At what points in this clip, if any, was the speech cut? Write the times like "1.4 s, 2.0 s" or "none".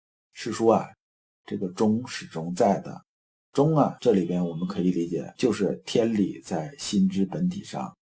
none

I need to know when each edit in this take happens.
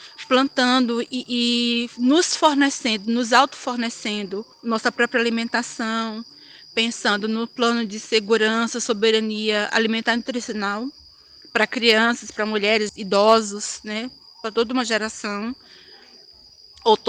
4.5 s, 12.9 s

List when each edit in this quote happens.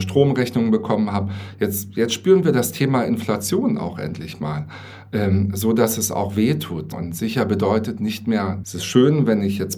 6.9 s, 8.6 s

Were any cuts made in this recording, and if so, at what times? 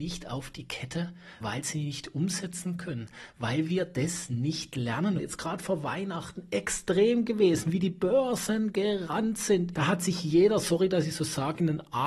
1.4 s, 5.2 s, 9.7 s

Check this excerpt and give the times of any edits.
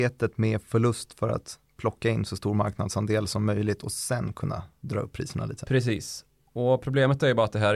none

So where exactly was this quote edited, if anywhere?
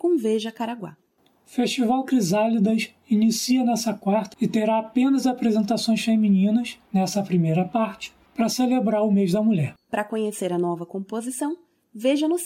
4.3 s, 9.8 s

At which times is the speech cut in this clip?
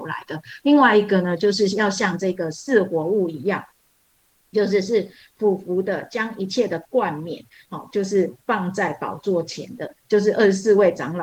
none

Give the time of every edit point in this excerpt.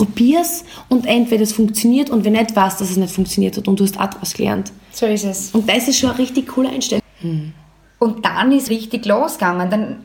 7.0 s, 8.7 s

